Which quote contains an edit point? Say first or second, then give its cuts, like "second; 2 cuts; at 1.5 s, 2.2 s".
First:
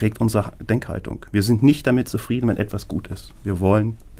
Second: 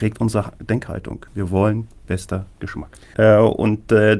second; 2 cuts; at 1.3 s, 3.1 s